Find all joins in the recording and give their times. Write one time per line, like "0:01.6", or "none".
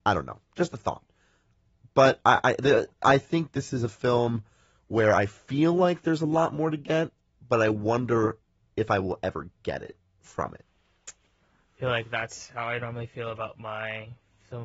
none